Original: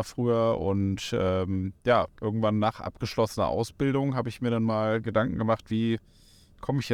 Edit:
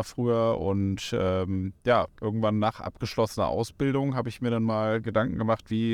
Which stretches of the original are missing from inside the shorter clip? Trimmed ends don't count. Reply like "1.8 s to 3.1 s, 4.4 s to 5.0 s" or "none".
none